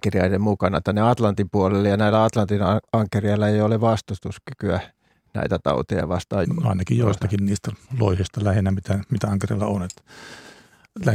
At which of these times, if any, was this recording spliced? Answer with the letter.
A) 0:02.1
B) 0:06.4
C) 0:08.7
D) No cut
B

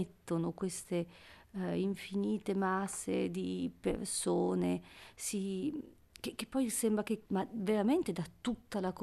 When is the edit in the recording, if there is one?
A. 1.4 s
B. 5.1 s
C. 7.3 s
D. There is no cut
C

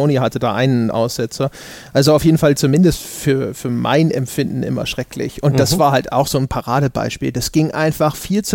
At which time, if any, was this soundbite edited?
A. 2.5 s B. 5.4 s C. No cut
A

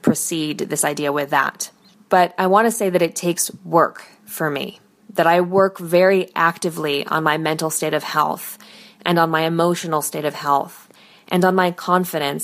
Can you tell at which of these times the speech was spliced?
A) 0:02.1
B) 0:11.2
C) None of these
C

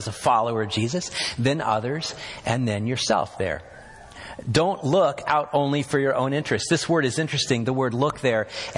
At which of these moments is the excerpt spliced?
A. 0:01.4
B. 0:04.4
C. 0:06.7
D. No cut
D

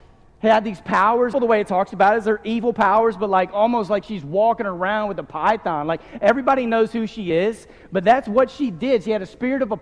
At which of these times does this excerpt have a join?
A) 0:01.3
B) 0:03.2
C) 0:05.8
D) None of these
A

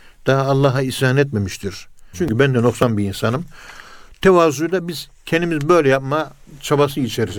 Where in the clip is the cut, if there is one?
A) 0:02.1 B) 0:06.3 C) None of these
A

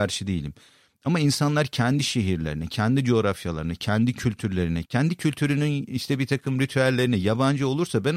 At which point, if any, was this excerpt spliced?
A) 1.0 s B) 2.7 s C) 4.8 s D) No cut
C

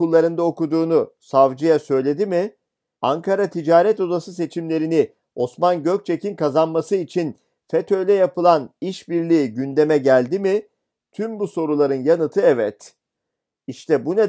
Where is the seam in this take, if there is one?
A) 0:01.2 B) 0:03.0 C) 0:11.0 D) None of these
B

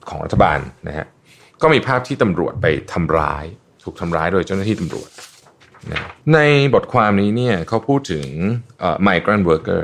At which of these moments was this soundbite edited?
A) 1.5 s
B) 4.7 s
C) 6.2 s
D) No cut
C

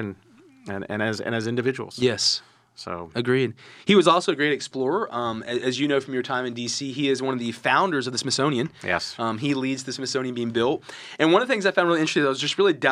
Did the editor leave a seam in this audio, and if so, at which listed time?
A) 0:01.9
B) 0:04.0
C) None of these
C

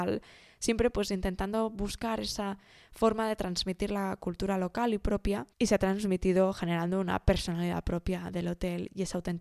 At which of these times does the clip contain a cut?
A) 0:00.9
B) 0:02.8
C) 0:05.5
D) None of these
C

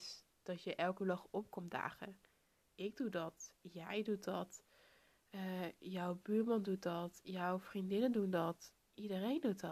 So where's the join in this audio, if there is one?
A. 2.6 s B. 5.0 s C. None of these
A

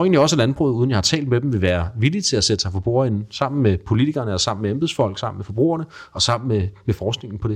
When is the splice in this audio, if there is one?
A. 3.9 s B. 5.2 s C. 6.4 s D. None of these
D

